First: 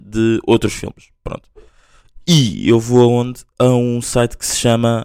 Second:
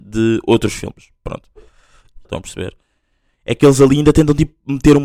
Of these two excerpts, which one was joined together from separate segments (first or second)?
second